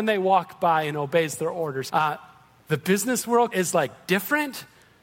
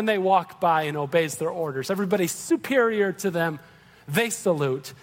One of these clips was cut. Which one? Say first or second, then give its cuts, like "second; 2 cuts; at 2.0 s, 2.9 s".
first; 2 cuts; at 1.9 s, 3.5 s